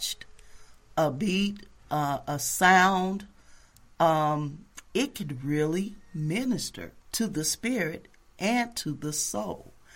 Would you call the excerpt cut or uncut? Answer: cut